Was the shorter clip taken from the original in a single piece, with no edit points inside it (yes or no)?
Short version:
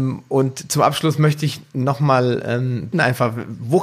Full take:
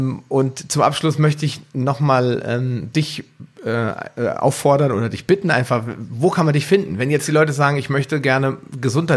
no